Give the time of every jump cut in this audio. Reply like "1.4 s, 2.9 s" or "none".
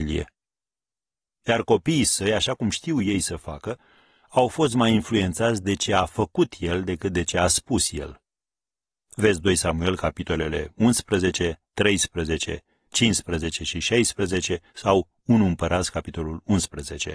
1.4 s